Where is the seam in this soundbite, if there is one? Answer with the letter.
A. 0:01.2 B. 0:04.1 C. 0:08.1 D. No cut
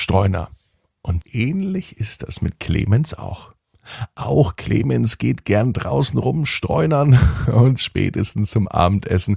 A